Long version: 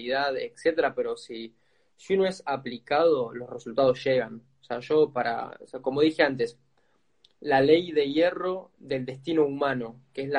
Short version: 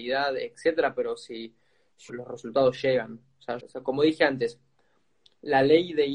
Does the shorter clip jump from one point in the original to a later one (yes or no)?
yes